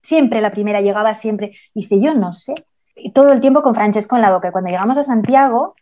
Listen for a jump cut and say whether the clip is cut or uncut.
uncut